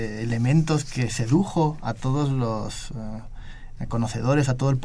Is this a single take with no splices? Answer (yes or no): yes